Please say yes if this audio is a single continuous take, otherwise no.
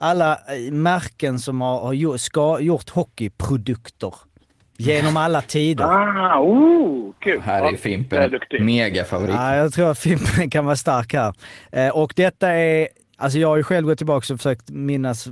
yes